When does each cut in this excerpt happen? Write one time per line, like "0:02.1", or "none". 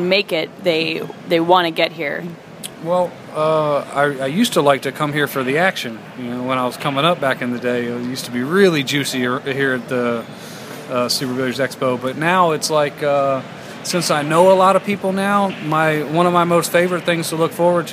none